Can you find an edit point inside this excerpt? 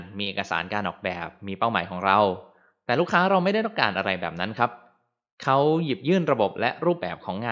no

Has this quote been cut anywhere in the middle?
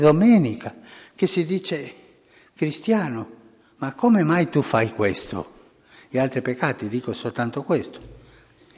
no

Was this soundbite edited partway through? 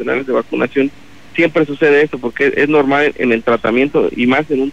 no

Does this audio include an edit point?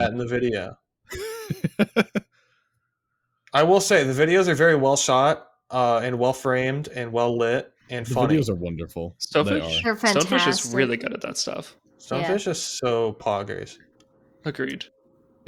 no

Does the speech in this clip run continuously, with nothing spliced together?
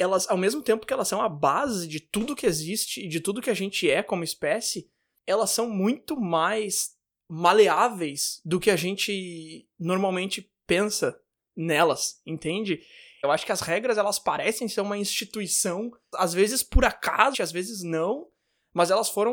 no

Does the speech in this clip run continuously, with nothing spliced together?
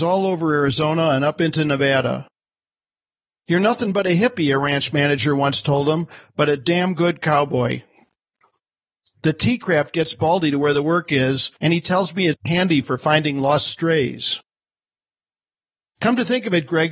yes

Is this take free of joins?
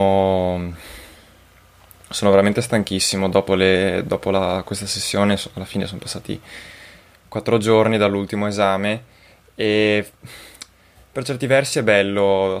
yes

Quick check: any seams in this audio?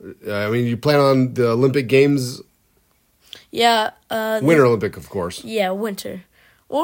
no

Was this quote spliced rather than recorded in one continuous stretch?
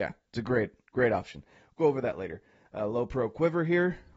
no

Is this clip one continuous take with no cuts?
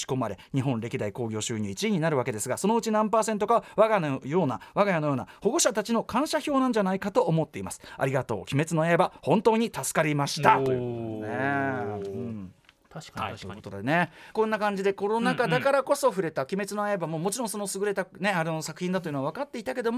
no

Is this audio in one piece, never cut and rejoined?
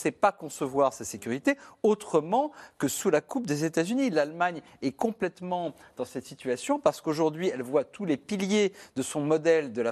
yes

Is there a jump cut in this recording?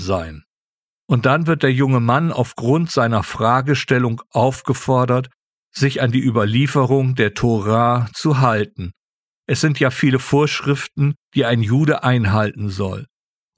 no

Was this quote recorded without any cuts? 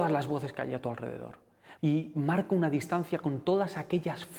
no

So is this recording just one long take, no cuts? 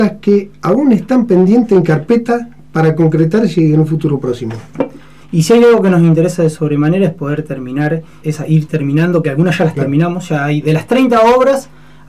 no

